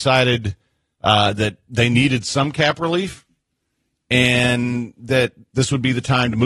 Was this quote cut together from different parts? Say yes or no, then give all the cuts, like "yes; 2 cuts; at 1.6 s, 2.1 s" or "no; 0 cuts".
no; 0 cuts